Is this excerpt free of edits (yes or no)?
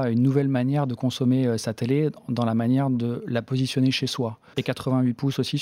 no